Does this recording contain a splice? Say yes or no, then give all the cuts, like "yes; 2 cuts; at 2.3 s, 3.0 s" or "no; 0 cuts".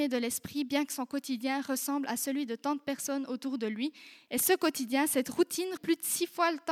yes; 2 cuts; at 4.3 s, 5.8 s